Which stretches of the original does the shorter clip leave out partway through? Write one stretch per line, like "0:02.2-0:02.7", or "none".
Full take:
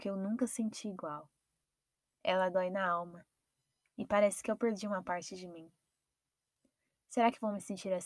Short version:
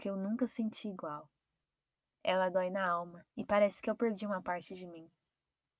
0:03.3-0:03.9